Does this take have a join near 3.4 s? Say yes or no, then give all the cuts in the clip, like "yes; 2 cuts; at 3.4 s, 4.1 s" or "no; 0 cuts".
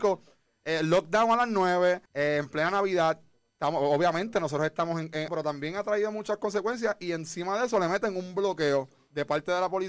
no; 2 cuts; at 2.1 s, 5.3 s